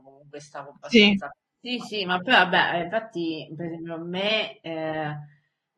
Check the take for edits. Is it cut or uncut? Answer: cut